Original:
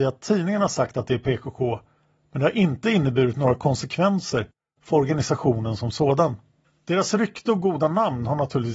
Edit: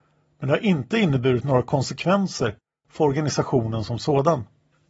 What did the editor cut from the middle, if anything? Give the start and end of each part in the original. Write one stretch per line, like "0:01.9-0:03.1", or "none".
none

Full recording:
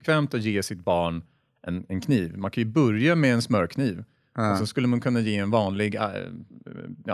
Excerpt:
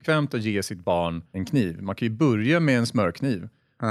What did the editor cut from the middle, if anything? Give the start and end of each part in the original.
0:01.3-0:01.9

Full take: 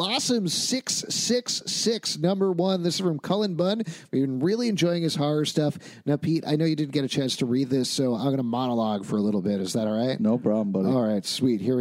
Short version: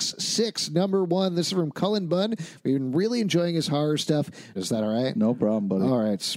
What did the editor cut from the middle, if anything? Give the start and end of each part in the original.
0:06.0-0:09.6

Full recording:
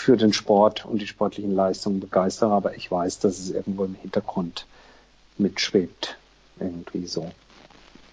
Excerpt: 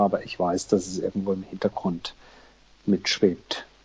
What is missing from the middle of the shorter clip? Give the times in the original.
none

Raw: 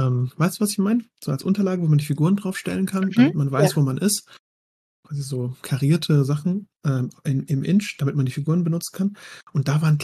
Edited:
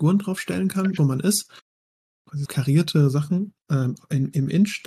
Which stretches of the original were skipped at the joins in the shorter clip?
0:03.1-0:03.7
0:05.2-0:05.6

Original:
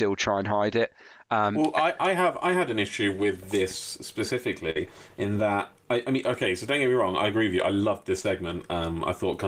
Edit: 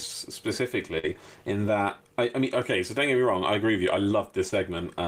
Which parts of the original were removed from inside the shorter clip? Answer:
none

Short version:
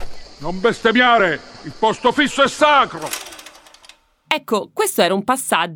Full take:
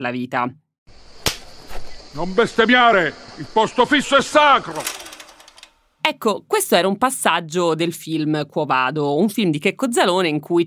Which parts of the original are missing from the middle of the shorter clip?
none

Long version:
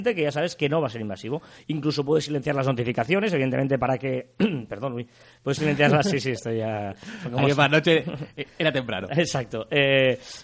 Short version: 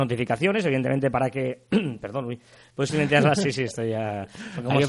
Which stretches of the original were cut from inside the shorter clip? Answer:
none

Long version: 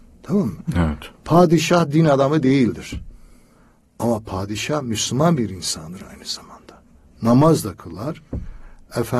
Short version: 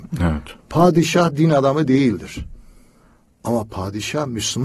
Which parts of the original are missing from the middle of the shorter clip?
none

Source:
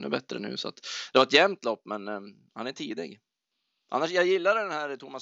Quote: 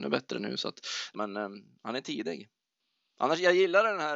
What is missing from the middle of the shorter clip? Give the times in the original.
0:01.1-0:01.8

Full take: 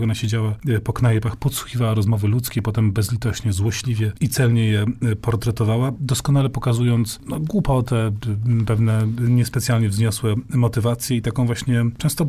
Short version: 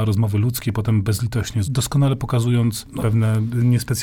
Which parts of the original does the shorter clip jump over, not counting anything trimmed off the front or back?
0:03.5-0:06.0
0:07.3-0:08.7

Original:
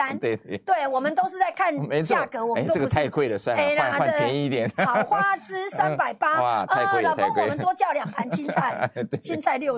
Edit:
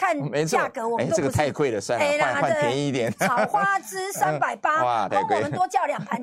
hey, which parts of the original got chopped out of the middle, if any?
0:06.7-0:07.2

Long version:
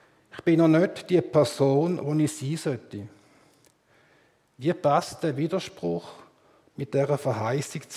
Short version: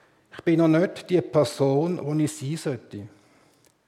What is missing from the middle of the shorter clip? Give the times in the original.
none

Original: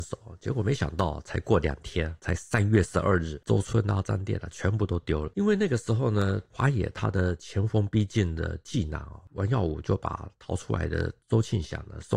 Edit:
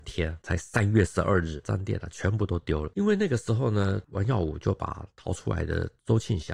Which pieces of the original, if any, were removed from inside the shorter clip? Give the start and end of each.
0:03.4-0:04.0
0:06.4-0:09.3

